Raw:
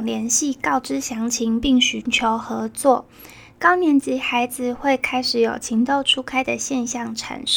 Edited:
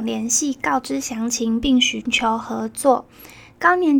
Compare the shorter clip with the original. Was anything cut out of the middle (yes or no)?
no